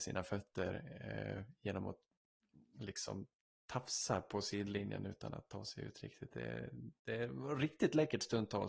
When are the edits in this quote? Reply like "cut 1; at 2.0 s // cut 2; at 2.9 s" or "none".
none